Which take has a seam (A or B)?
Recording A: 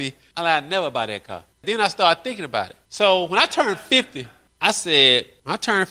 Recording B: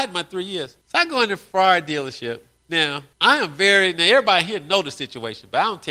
A